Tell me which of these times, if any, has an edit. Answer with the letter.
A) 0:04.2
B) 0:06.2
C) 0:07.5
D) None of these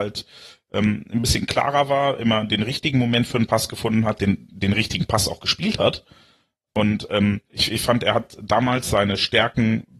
C